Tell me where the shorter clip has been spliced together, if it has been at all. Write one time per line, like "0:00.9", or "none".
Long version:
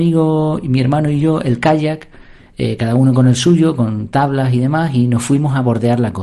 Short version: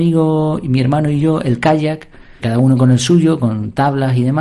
0:02.4